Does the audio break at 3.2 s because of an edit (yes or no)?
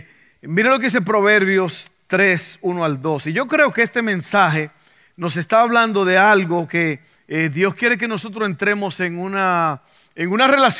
no